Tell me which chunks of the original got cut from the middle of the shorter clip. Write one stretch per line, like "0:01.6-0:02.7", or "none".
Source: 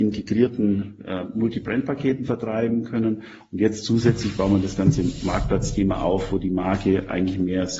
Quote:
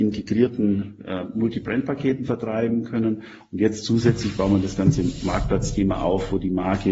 none